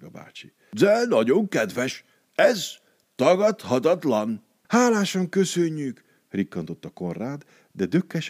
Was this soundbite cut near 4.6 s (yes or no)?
yes